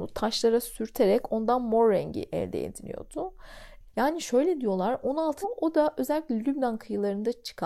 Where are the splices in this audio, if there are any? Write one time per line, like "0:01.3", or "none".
0:03.9
0:05.4